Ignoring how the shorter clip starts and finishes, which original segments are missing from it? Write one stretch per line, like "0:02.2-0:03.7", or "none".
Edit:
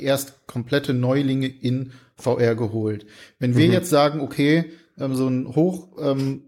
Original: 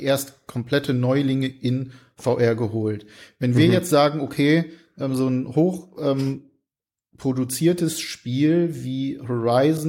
none